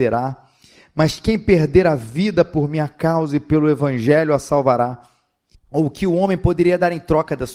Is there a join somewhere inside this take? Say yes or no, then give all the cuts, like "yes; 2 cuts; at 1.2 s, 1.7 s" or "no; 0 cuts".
yes; 1 cut; at 5.5 s